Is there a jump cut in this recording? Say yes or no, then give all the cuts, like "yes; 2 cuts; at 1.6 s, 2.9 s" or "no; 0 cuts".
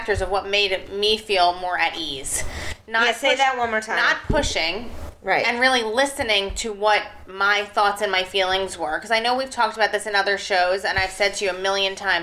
no; 0 cuts